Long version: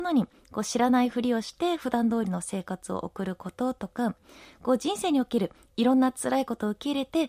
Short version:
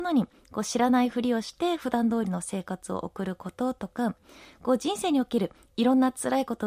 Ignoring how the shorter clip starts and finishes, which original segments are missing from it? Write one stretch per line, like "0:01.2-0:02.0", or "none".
none